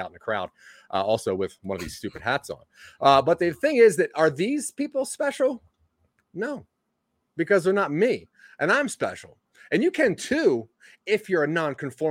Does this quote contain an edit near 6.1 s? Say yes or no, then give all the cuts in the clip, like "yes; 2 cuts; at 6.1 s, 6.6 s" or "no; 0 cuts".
no; 0 cuts